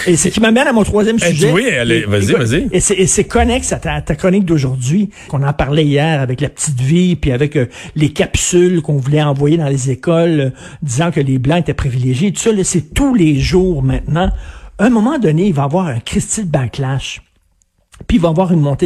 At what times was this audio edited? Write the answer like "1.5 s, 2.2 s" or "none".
5.3 s